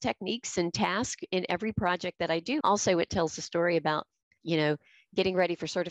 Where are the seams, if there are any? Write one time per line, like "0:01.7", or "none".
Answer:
0:02.6